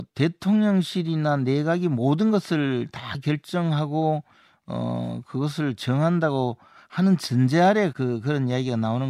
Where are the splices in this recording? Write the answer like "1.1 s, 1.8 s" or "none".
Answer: 7.9 s

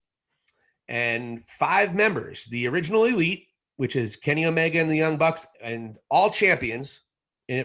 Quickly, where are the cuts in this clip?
5.5 s

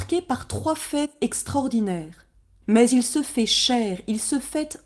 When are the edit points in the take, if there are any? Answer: 2.6 s

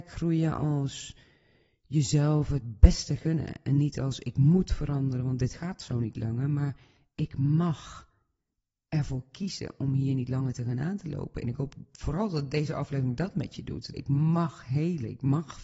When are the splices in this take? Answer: 11.4 s, 13.9 s

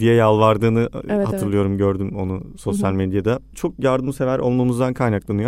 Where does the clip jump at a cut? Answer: none

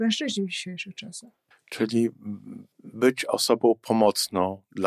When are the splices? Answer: 1.5 s, 2.7 s

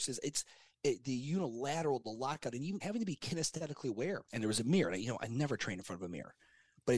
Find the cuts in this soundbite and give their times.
2.8 s, 4.3 s

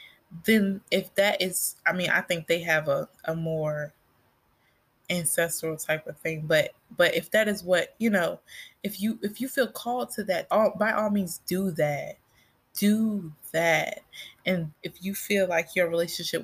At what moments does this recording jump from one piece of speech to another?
10.5 s, 14.7 s

